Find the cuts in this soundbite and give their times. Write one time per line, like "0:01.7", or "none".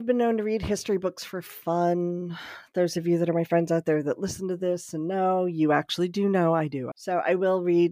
0:06.9